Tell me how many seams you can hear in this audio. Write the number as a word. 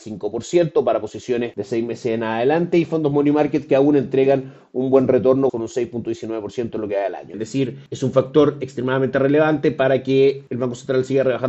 two